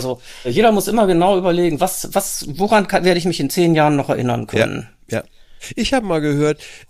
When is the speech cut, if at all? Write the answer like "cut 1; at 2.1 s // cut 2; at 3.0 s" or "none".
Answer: none